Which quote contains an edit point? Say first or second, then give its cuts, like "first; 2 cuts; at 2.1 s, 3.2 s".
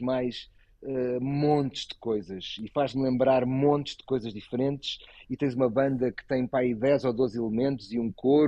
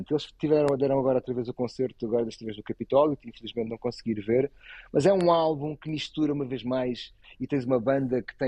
second; 1 cut; at 7.2 s